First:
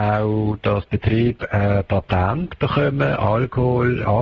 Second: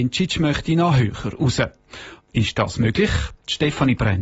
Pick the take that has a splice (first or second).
second